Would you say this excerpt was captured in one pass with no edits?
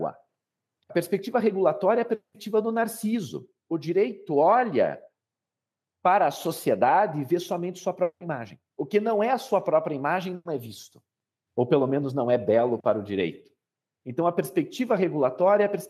no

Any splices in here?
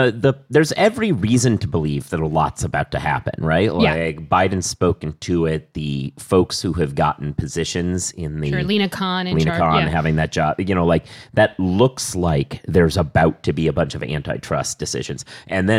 no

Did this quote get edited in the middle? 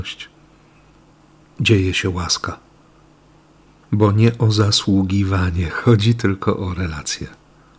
no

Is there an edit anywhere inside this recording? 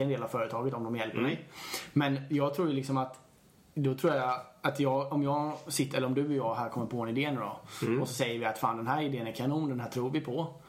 no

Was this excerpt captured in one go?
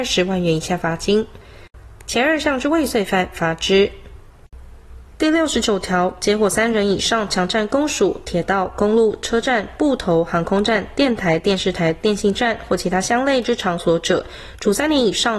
yes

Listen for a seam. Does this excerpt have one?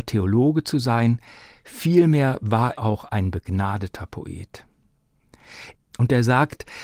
yes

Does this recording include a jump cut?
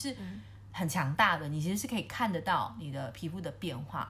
no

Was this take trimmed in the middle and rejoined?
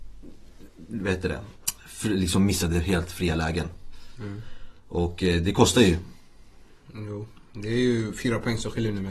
no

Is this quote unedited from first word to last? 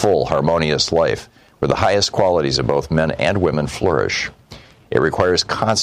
no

